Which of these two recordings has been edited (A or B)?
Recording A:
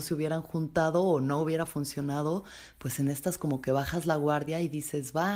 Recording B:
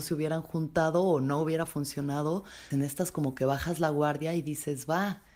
B